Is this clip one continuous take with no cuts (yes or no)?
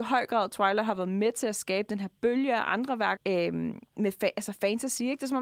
no